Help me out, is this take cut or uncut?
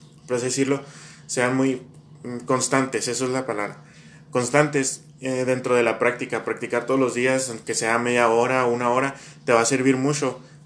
uncut